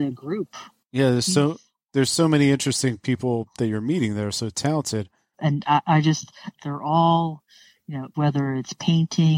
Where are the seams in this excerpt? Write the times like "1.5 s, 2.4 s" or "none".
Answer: 5.3 s, 6.6 s, 8.1 s